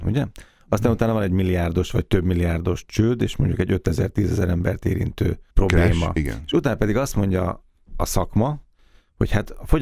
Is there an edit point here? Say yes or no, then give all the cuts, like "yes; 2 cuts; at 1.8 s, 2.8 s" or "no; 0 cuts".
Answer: yes; 1 cut; at 5.5 s